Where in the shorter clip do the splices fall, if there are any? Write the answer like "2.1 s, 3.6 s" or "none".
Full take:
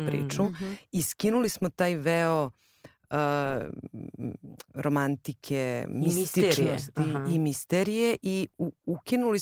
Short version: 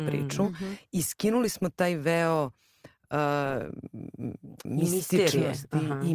4.7 s